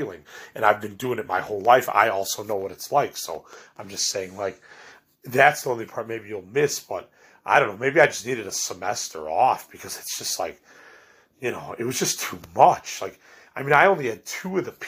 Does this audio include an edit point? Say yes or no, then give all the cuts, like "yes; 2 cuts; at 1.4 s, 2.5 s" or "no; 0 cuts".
no; 0 cuts